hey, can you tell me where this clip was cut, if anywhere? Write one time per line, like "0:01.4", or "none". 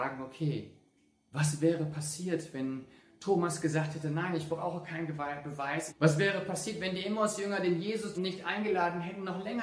0:05.9
0:08.2

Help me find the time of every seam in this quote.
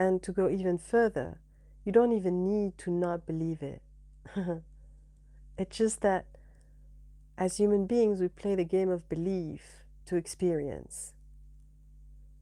none

